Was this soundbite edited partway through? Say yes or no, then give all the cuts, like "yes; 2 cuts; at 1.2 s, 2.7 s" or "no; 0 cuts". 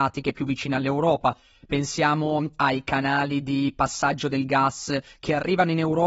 no; 0 cuts